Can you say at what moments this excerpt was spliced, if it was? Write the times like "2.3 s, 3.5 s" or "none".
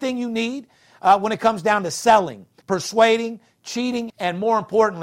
2.6 s, 4.1 s